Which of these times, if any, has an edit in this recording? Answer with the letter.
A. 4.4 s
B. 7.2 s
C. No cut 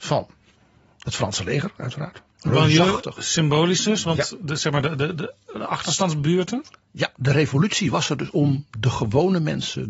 C